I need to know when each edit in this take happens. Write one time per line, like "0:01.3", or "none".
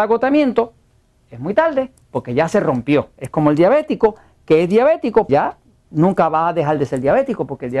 0:05.3